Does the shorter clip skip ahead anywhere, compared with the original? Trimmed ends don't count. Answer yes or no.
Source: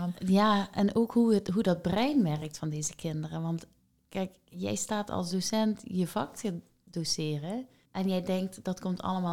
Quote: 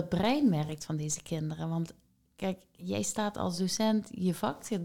no